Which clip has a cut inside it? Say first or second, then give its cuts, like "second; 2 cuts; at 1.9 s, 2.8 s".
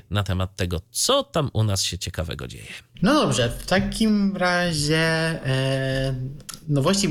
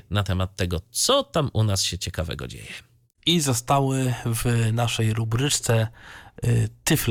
first; 1 cut; at 2.9 s